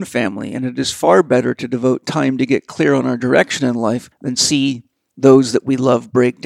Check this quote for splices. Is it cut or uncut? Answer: uncut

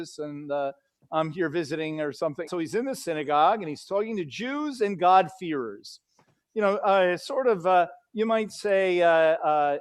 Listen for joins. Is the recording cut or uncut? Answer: cut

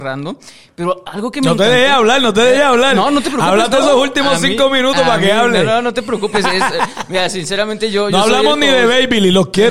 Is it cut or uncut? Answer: uncut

